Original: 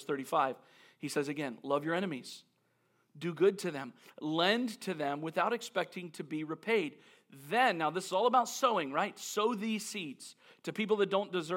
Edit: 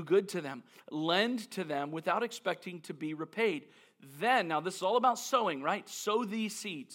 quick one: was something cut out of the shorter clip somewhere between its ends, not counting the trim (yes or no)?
no